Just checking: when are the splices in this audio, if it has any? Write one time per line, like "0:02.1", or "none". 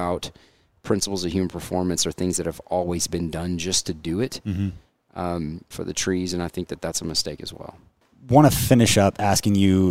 0:05.7

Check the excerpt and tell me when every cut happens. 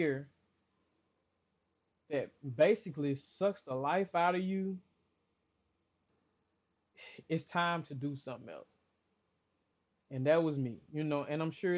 none

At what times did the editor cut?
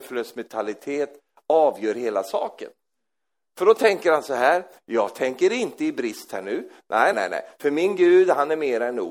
0:07.1

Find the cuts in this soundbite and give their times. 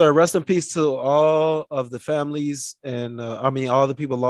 none

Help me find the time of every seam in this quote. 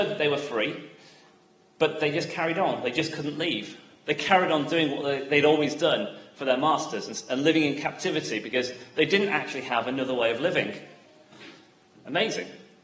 none

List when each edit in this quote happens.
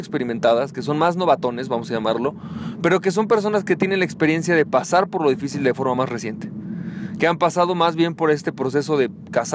none

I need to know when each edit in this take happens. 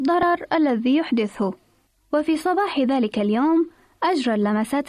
0:02.0

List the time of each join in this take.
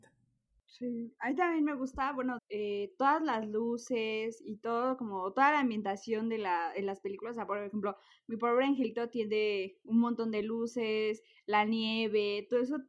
0:02.4

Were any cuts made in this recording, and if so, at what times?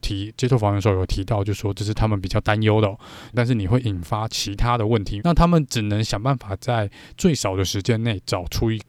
0:03.3
0:05.2

